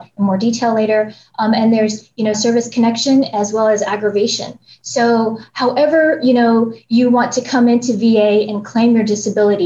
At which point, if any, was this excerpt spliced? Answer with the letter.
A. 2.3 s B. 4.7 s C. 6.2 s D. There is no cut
A